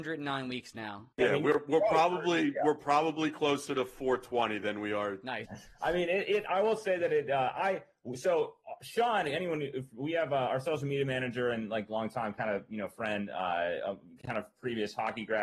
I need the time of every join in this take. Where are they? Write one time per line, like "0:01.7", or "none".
0:01.1
0:05.4